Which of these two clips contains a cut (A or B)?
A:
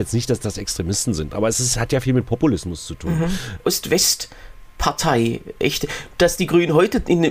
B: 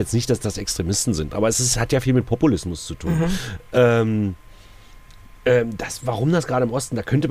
A